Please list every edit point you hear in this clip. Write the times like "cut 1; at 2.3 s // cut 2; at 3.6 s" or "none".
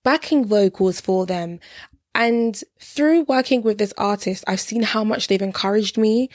none